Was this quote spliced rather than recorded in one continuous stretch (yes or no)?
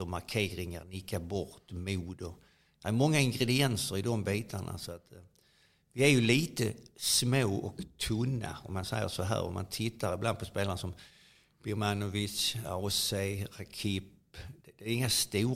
no